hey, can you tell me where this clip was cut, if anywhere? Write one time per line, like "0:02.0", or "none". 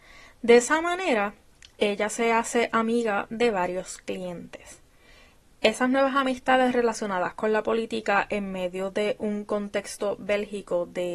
none